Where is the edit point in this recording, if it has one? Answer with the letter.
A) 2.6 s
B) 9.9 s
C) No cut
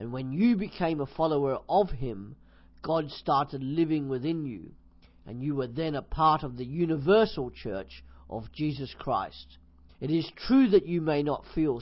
B